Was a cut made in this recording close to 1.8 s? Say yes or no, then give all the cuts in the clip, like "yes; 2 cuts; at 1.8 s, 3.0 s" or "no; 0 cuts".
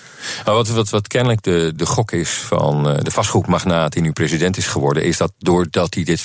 yes; 1 cut; at 1.8 s